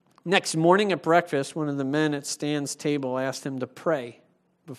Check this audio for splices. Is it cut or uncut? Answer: uncut